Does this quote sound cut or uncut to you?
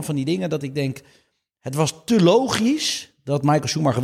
uncut